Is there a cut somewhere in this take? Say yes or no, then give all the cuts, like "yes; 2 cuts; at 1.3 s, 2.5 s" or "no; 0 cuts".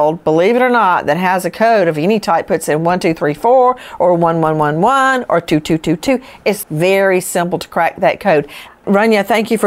yes; 2 cuts; at 6.6 s, 8.7 s